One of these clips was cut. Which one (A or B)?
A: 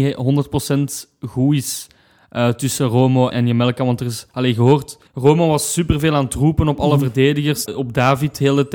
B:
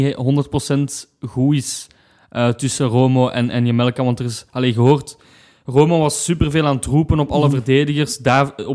A